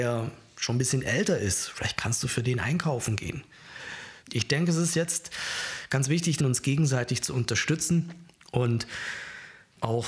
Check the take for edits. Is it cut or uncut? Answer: cut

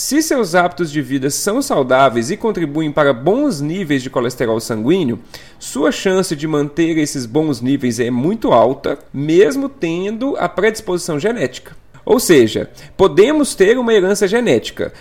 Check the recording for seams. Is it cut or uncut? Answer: cut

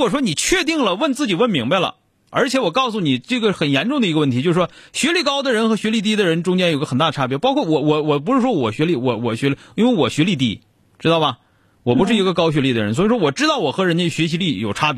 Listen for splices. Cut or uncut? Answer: uncut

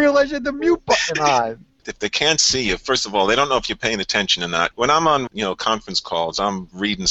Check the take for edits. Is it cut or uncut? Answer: cut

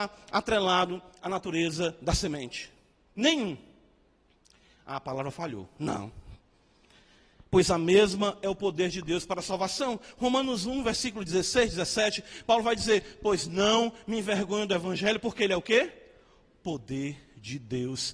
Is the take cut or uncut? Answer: uncut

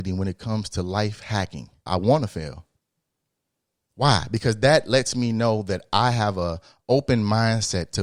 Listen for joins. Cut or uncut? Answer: cut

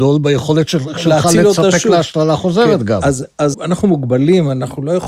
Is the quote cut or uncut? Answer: cut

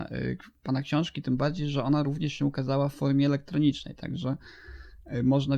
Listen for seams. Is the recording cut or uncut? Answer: uncut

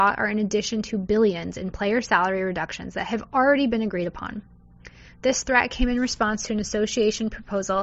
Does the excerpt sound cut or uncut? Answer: uncut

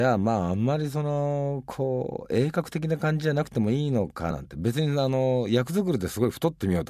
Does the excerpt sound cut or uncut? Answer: cut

